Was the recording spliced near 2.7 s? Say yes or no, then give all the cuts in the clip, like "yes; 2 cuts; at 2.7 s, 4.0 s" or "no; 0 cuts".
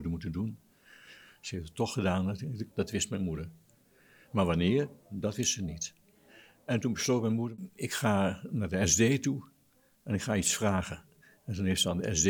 yes; 1 cut; at 2.7 s